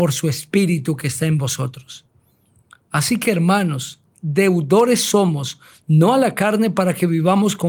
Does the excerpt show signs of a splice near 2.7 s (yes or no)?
no